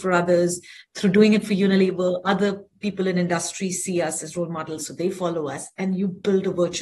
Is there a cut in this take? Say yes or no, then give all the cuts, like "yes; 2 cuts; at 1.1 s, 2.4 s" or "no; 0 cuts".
no; 0 cuts